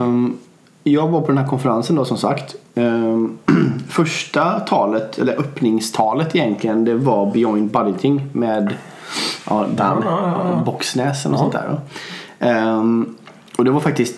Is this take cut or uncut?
cut